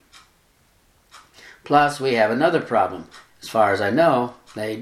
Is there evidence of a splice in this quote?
yes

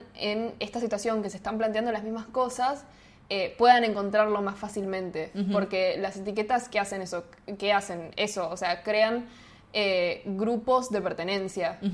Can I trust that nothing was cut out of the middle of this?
yes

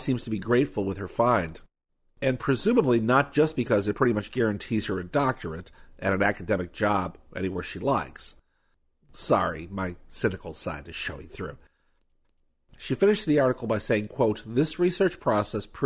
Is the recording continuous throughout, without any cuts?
yes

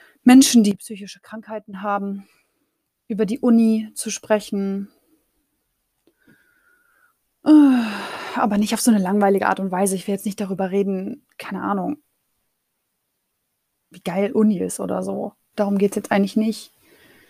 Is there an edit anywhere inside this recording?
yes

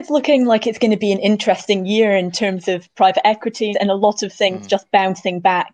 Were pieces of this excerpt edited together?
yes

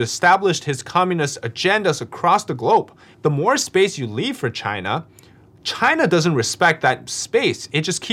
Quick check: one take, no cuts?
no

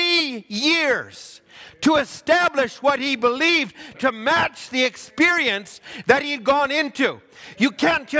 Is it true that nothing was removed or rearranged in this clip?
no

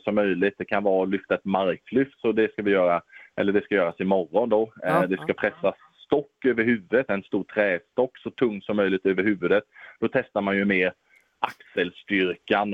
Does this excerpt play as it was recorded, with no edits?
yes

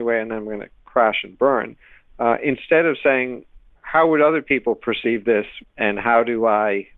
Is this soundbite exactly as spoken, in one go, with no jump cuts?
no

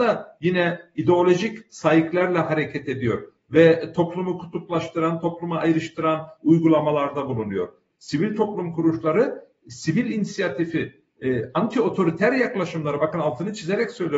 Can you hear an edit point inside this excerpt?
yes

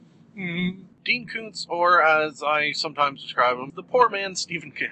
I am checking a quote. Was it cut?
yes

